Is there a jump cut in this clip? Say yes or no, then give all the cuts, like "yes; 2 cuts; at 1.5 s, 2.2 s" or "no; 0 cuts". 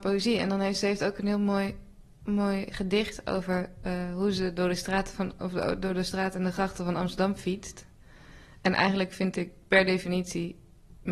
no; 0 cuts